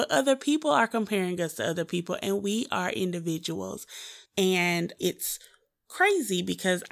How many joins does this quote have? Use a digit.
1